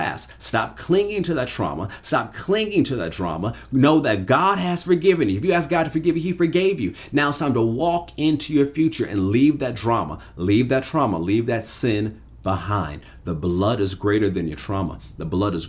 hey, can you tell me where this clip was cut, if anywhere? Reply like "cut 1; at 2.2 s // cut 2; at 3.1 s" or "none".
none